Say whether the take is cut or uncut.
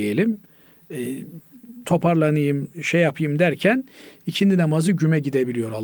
cut